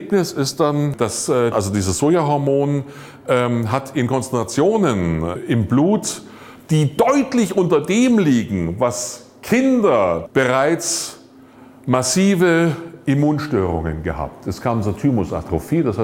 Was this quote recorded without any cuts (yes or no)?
no